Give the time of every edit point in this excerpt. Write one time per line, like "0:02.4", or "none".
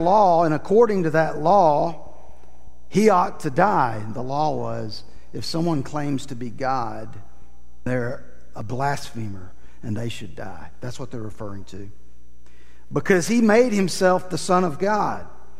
0:07.9